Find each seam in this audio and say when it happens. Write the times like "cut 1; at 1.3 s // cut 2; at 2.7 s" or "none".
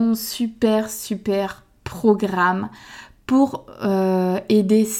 none